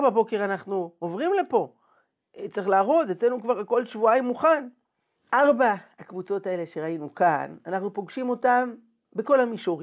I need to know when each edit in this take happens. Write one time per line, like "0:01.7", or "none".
0:05.2